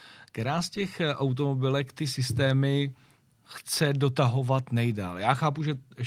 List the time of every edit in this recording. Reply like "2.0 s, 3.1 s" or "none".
none